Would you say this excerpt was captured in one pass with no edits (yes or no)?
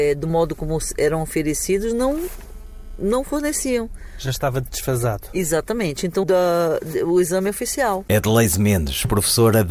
no